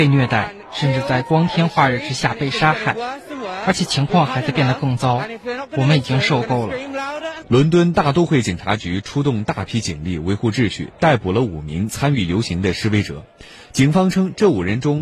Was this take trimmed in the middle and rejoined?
yes; 1 cut; at 7.4 s

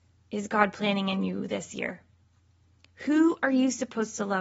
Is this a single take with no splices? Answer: yes; 0 cuts

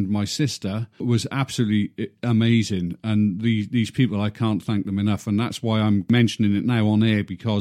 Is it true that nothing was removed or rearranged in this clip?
yes; 0 cuts

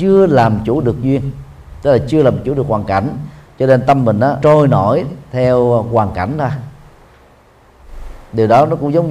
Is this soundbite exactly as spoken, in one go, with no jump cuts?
no; 1 cut; at 4.4 s

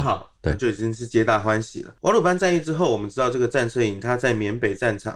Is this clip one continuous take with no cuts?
yes; 0 cuts

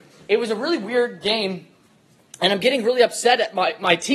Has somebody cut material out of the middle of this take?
no; 0 cuts

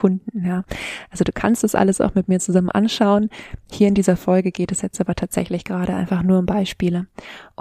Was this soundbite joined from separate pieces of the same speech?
no; 0 cuts

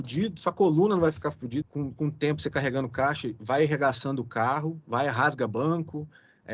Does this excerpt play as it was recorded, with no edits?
no; 1 cut; at 1.6 s

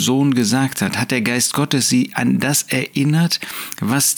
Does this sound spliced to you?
no; 0 cuts

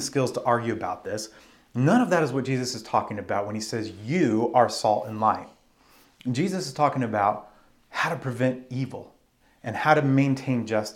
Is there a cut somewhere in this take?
no; 0 cuts

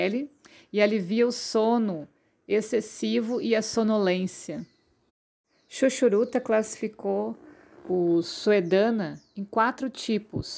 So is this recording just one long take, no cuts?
yes; 0 cuts

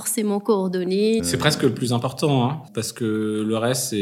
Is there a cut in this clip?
yes; 2 cuts; at 1.2 s, 2.7 s

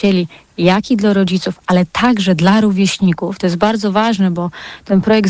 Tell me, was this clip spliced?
no; 0 cuts

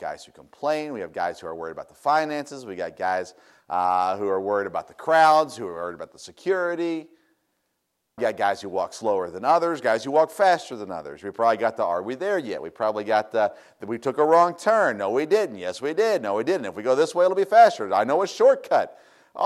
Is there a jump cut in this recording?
yes; 1 cut; at 8.2 s

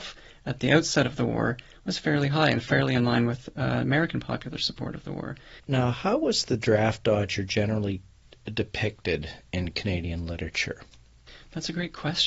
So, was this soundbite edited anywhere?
yes; 1 cut; at 5.6 s

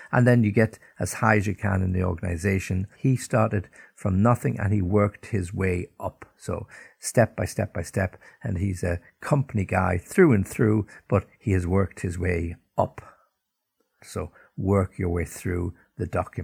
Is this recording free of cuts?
no; 2 cuts; at 2.9 s, 14.0 s

